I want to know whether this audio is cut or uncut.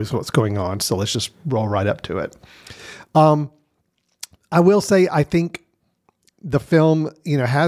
uncut